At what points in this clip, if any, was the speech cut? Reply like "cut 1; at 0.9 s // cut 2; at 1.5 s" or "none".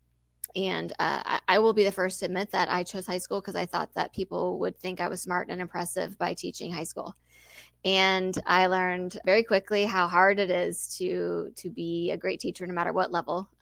none